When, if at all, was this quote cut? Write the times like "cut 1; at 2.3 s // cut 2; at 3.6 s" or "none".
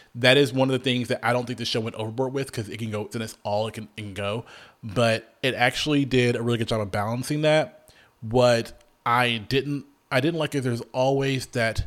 cut 1; at 3.1 s